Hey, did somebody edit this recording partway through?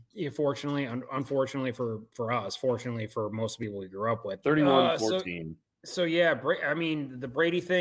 yes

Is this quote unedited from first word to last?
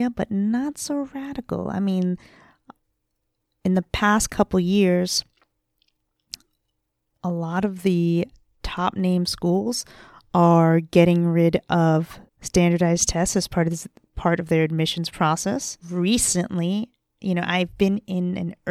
no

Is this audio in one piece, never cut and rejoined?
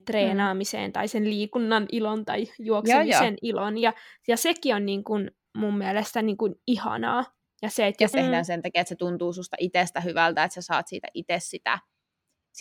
no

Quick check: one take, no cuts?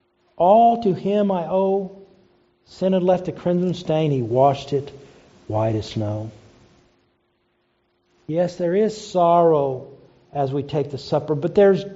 yes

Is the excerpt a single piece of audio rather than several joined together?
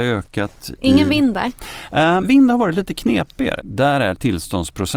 no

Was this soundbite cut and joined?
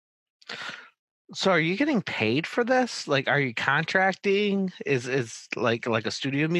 no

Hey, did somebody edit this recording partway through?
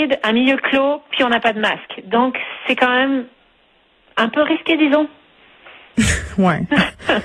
no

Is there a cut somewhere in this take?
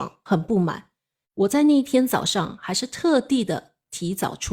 yes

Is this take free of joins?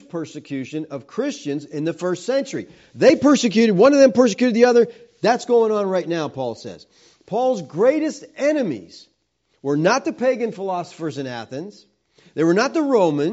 yes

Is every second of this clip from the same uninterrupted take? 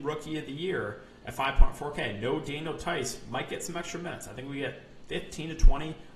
yes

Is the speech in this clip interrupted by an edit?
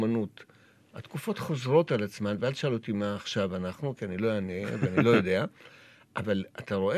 no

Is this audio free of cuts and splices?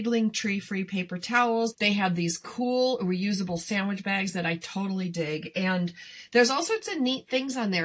no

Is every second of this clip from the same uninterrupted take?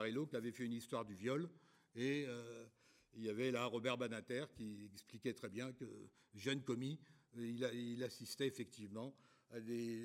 yes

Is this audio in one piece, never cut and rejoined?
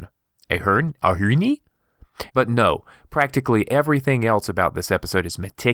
no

